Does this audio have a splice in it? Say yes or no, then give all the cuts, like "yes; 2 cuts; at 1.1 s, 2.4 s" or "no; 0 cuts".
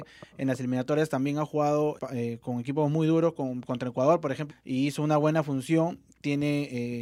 yes; 2 cuts; at 2.0 s, 4.5 s